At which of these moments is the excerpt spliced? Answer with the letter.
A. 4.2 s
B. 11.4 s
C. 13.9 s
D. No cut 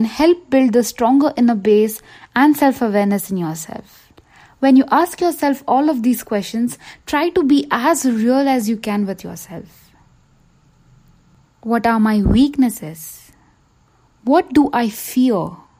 B